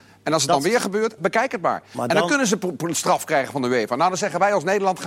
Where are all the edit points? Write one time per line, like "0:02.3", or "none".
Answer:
0:01.2